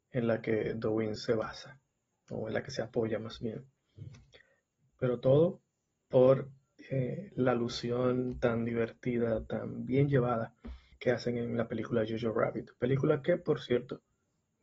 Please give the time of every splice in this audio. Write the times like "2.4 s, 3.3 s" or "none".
1.2 s, 4.9 s, 10.9 s